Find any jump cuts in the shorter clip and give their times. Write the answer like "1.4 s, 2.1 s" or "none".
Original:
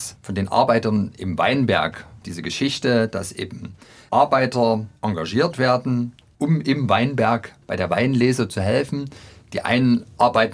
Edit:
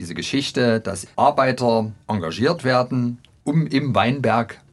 1.1 s